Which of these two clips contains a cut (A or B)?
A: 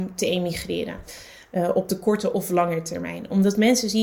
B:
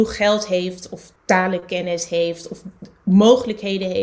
B